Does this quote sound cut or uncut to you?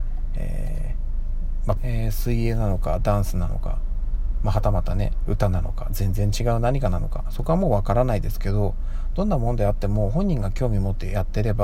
cut